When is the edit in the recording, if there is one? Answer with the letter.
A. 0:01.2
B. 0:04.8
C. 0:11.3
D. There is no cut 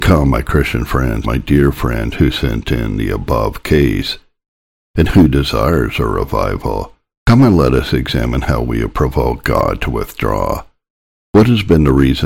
A